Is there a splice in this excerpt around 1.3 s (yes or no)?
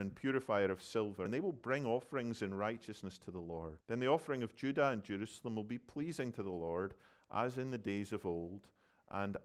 yes